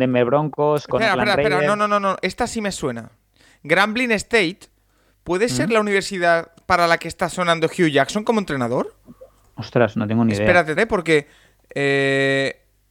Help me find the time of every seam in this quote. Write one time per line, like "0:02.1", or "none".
0:10.8